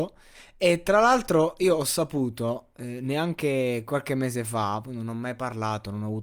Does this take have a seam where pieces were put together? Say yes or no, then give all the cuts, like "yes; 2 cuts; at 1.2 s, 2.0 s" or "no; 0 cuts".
no; 0 cuts